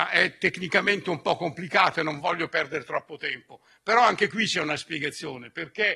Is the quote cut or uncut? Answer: cut